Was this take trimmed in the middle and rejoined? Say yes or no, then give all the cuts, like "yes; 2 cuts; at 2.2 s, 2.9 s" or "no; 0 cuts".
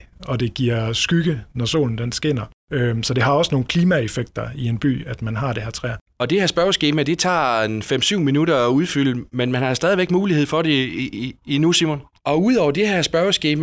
yes; 2 cuts; at 6.1 s, 12.2 s